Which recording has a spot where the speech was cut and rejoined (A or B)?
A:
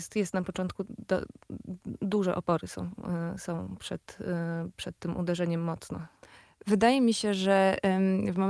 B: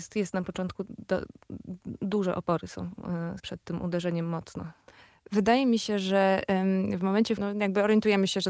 B